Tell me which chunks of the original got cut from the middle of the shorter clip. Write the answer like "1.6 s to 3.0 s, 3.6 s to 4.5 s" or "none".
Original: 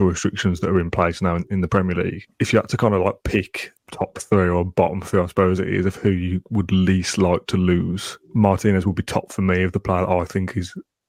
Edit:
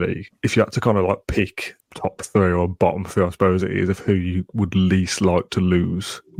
none

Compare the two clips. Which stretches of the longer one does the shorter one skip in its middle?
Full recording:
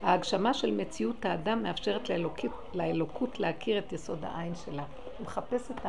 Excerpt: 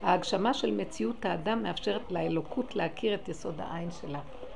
2.0 s to 2.7 s

